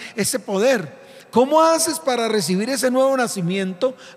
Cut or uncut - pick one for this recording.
uncut